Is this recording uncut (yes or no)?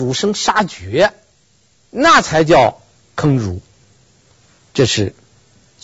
yes